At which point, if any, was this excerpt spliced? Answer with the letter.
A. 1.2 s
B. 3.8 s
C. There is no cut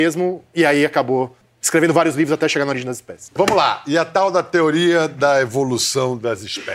C